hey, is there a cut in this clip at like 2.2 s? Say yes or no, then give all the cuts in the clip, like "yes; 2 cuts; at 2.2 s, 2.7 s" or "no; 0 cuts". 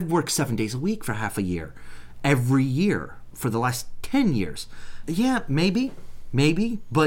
no; 1 cut; at 5.0 s